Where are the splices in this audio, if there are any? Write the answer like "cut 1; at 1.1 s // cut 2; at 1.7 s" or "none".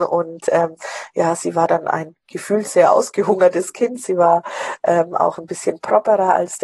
none